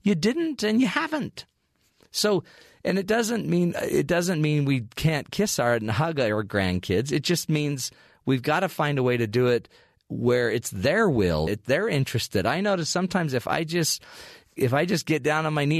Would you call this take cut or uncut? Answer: cut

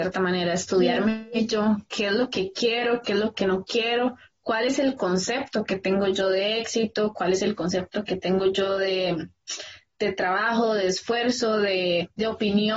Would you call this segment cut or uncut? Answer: uncut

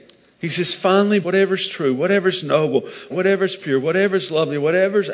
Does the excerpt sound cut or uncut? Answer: cut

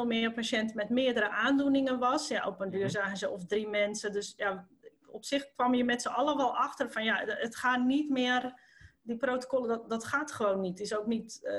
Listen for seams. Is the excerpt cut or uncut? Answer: uncut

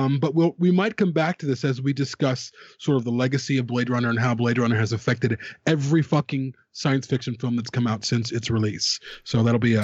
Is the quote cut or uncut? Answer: uncut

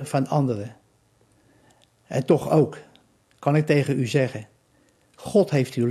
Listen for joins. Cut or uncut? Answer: uncut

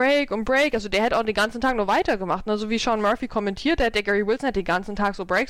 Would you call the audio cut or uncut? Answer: uncut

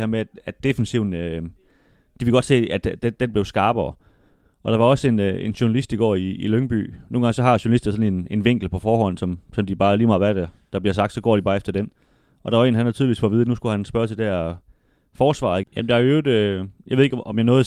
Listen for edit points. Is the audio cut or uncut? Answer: cut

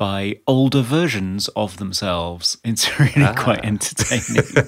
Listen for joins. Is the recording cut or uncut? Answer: uncut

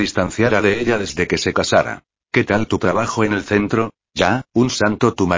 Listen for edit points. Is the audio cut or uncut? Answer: cut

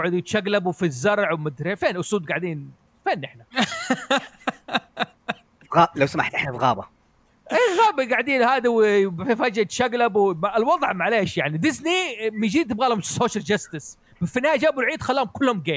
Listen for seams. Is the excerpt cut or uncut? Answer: uncut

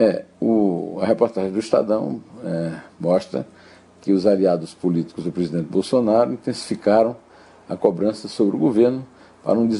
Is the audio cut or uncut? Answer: uncut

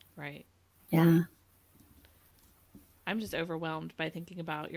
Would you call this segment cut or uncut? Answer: uncut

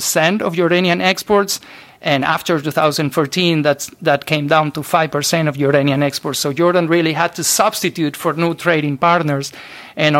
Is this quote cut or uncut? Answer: uncut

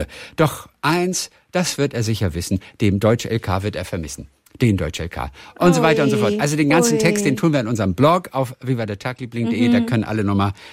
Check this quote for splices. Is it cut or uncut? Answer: uncut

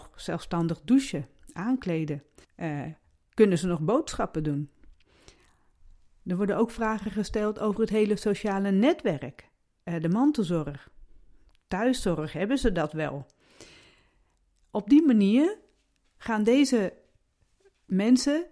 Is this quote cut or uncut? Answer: cut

